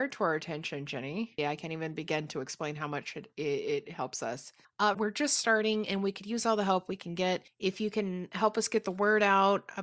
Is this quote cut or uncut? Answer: cut